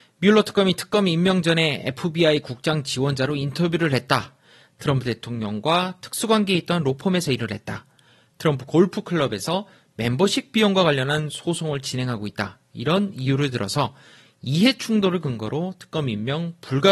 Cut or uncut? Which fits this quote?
uncut